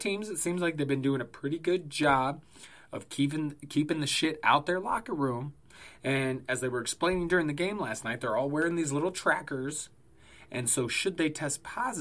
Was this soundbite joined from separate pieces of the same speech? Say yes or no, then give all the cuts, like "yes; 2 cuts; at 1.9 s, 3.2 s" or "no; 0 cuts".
no; 0 cuts